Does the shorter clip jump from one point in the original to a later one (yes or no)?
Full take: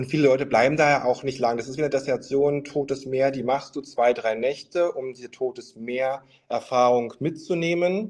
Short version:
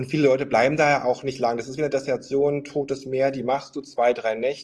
no